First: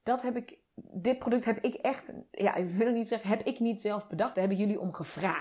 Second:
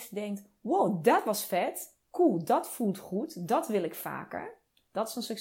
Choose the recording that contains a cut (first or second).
first